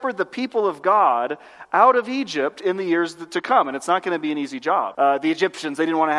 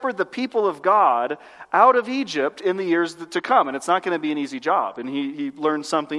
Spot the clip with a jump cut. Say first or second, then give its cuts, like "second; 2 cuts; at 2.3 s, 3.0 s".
first; 1 cut; at 4.9 s